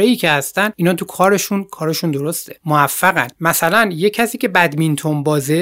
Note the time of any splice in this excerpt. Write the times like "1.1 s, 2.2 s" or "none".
none